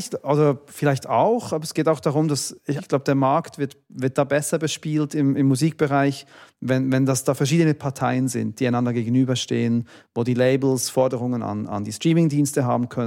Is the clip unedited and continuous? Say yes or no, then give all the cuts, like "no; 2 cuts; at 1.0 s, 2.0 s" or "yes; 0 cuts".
no; 1 cut; at 2.8 s